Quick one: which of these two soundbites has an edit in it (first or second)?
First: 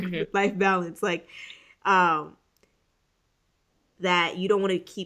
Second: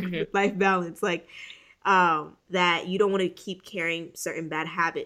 second